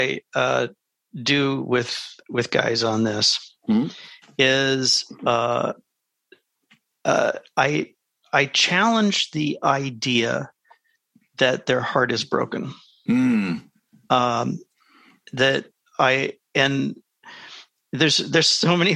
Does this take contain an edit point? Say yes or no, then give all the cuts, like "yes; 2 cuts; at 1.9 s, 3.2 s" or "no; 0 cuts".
no; 0 cuts